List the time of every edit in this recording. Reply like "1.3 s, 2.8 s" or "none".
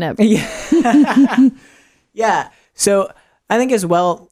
none